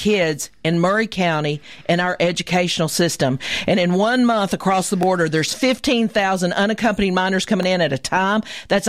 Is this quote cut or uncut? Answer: uncut